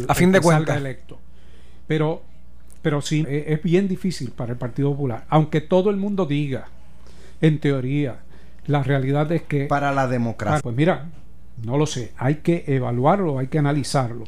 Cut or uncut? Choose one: cut